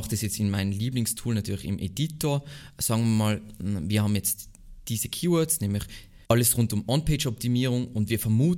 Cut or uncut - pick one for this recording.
cut